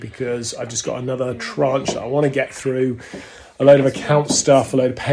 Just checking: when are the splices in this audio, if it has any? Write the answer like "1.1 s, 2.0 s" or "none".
none

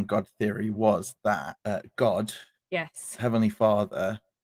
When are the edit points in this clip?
1.6 s

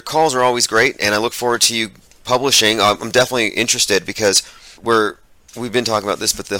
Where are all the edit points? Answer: 4.8 s

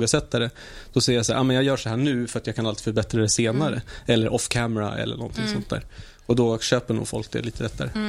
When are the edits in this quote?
none

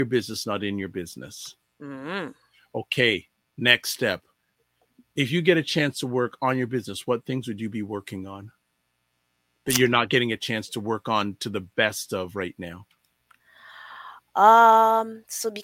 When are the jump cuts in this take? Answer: none

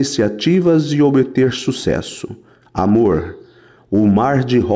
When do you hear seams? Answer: none

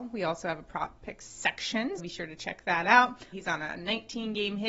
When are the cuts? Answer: 2.0 s, 3.3 s

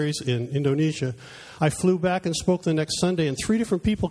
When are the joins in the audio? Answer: none

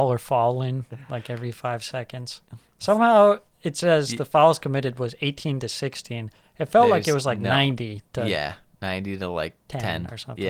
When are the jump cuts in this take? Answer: none

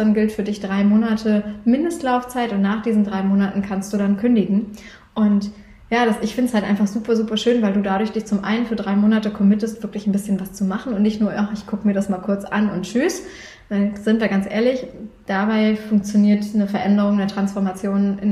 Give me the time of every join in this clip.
none

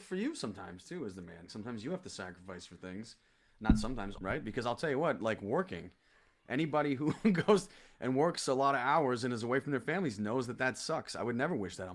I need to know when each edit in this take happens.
1.5 s, 4.2 s

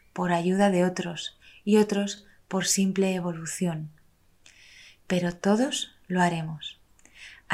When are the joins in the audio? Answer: none

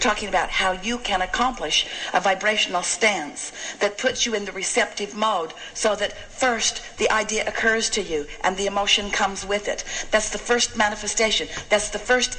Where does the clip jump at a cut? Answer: none

